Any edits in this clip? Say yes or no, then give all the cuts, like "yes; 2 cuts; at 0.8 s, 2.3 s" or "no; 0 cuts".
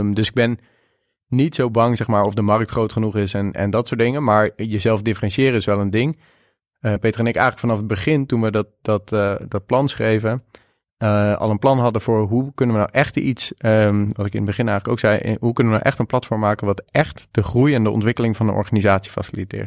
yes; 1 cut; at 7.0 s